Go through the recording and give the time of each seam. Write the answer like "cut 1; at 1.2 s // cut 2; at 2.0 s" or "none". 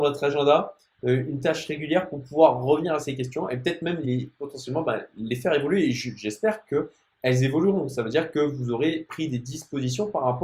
cut 1; at 4.0 s